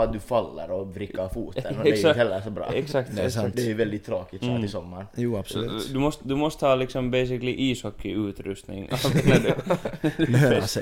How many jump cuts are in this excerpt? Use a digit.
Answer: 0